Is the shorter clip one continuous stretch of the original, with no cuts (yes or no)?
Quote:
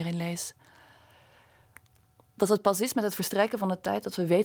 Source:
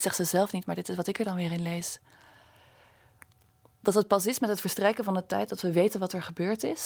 yes